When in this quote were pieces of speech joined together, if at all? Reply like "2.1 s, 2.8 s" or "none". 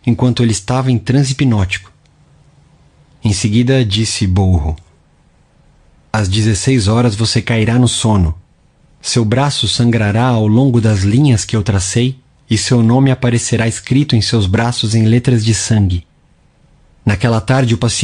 none

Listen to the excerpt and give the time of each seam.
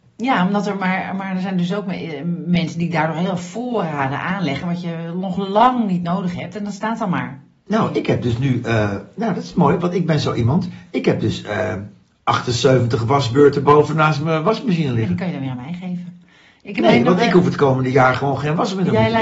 none

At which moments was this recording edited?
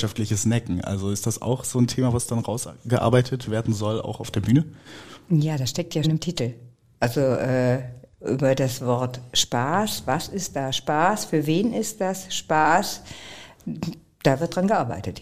6.0 s

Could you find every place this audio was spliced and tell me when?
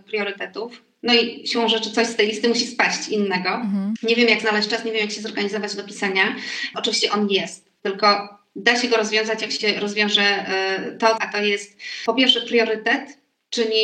4.0 s, 6.7 s, 11.2 s

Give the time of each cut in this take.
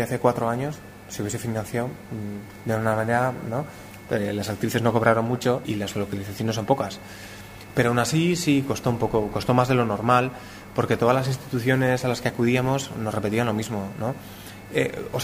4.1 s, 5.6 s

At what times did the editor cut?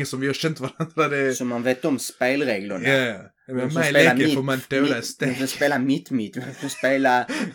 none

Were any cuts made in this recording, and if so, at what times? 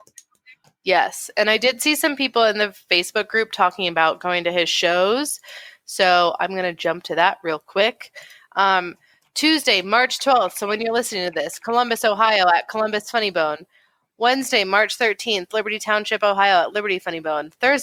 none

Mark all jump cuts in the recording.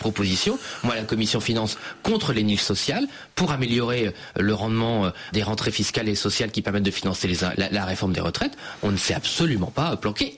5.3 s, 7.5 s

